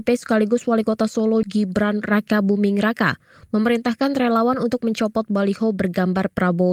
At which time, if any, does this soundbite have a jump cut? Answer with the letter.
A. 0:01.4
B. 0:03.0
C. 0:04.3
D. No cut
A